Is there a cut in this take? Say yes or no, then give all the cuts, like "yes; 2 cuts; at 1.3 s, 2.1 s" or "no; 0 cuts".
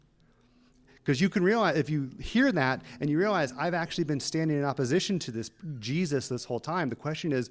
no; 0 cuts